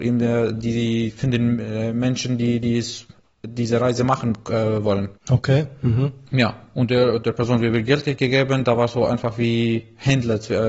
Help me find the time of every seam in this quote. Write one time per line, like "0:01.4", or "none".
0:05.2